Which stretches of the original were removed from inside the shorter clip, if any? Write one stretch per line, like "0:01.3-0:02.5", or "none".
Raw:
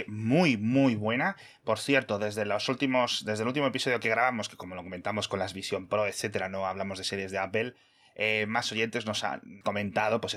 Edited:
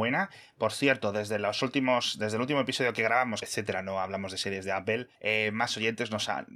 0:04.5-0:06.1
0:07.8-0:08.1